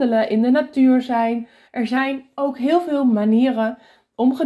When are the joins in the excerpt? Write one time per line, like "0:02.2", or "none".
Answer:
0:01.7